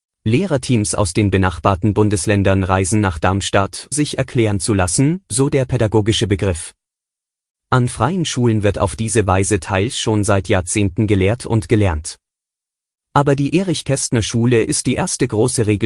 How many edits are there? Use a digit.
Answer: 2